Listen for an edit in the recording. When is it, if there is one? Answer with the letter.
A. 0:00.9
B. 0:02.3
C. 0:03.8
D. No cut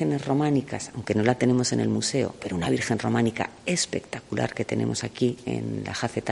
D